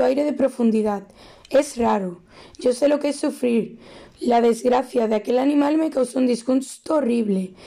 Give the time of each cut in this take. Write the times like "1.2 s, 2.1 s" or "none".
4.1 s